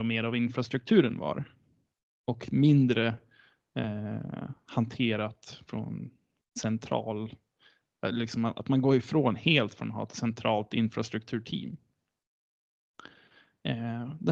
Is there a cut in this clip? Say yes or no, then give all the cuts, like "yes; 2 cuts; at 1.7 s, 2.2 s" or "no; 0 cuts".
no; 0 cuts